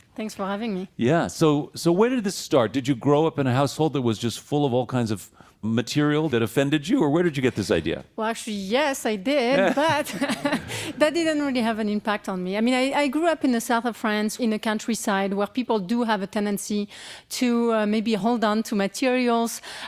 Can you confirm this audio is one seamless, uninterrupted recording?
yes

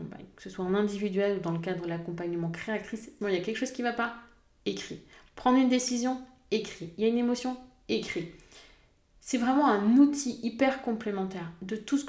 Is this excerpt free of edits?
no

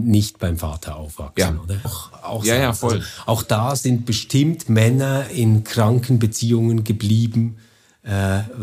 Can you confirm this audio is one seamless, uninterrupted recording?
no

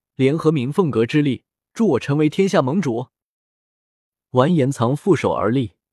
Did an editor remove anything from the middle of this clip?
yes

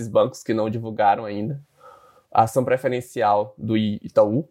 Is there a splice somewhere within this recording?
no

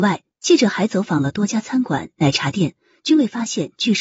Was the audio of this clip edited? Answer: no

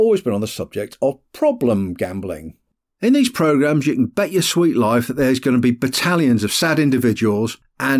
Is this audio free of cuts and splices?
yes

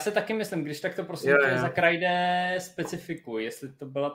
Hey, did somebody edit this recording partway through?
no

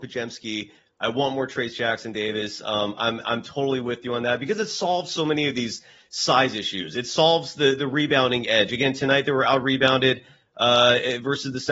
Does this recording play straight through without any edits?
yes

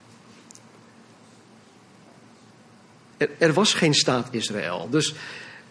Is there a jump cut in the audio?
no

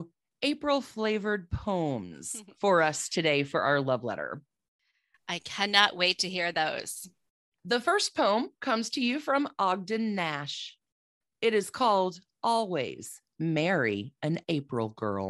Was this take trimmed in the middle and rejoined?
no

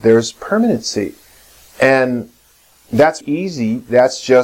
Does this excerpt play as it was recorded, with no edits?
no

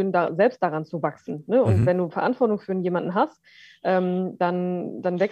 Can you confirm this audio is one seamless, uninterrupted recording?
yes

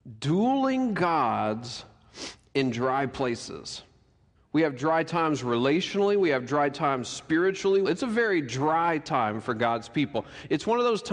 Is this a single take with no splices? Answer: no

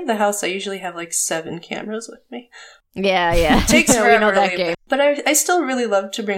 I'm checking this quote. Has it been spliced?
yes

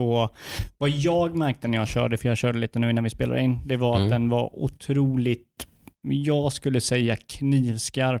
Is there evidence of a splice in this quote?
no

